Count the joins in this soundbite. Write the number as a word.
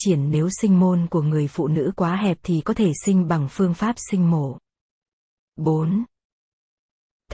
one